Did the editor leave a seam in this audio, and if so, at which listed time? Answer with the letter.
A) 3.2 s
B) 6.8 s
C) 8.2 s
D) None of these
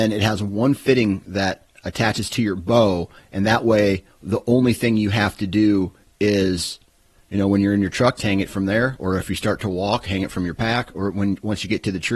C